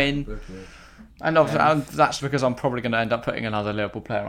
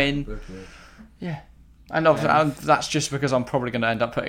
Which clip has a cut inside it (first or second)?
first